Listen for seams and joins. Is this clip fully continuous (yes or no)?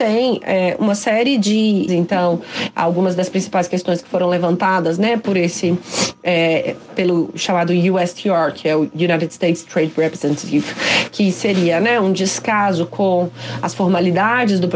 no